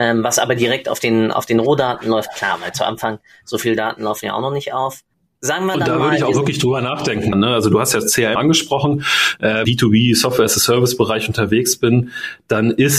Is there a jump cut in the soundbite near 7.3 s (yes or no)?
yes